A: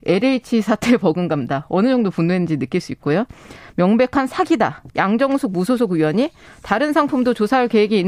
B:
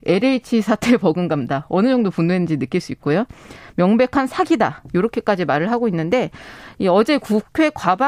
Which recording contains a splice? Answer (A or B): A